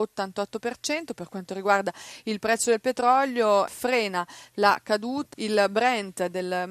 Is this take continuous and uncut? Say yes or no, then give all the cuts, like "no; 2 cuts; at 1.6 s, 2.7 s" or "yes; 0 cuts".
no; 2 cuts; at 3.7 s, 5.3 s